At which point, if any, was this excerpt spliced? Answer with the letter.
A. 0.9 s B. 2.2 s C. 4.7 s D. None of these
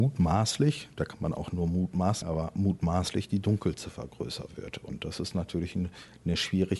B